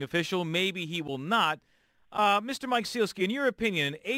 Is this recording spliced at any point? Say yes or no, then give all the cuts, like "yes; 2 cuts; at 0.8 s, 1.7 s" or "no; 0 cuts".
no; 0 cuts